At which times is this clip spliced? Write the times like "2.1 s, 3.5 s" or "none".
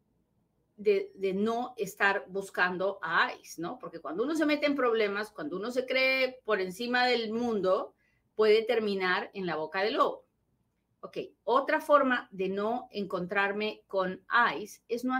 none